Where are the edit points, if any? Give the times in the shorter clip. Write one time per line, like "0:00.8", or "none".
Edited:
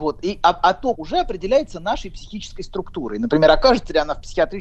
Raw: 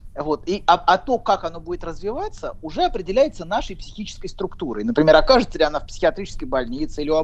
0:00.9